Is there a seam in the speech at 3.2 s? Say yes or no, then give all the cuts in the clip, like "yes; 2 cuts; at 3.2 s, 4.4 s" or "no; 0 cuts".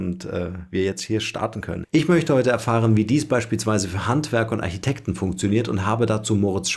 no; 1 cut; at 1.8 s